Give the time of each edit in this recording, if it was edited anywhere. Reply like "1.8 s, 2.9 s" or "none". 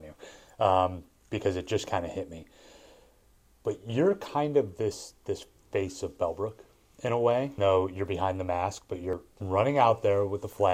7.6 s